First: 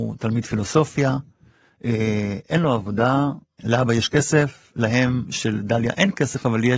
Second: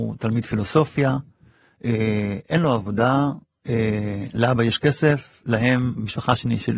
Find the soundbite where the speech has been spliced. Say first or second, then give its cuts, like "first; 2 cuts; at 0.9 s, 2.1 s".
first; 2 cuts; at 3.6 s, 5.2 s